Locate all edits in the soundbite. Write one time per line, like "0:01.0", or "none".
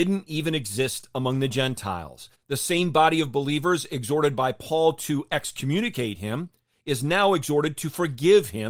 0:02.3